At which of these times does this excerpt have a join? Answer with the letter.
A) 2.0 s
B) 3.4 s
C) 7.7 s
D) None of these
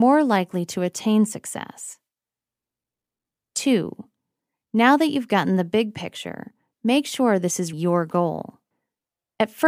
C